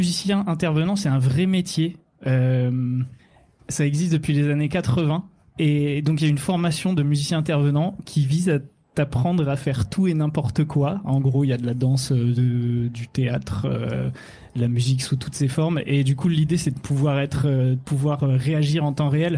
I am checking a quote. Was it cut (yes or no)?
no